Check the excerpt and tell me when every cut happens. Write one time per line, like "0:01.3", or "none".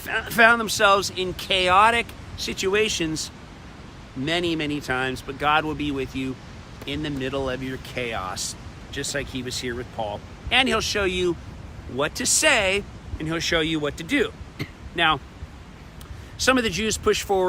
none